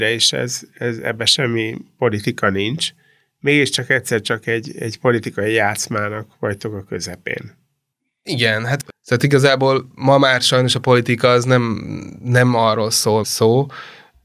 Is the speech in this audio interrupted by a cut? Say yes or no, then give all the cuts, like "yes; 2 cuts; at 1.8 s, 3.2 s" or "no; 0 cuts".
yes; 1 cut; at 13.2 s